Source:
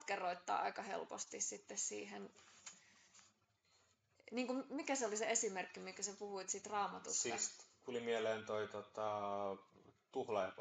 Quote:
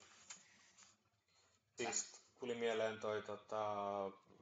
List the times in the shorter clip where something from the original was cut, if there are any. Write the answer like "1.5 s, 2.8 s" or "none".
1.8 s